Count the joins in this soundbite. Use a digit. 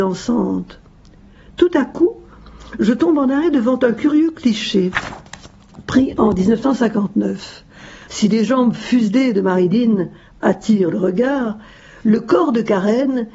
1